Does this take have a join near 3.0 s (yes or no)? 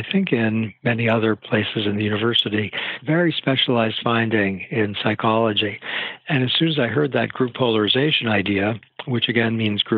yes